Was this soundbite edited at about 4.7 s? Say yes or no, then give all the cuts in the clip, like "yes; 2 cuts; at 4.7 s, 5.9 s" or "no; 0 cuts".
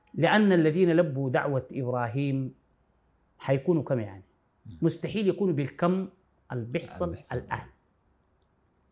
no; 0 cuts